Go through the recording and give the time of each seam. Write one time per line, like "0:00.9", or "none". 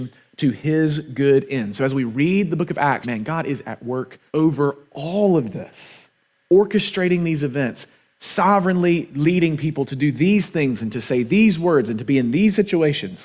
0:03.0
0:04.3